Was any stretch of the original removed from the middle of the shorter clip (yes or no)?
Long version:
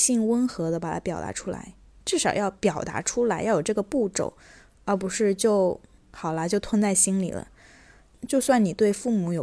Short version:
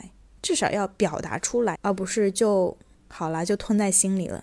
yes